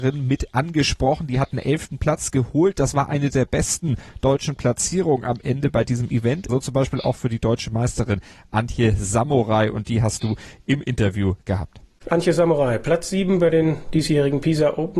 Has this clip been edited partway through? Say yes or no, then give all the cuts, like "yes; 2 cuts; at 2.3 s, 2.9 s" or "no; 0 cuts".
yes; 1 cut; at 6.5 s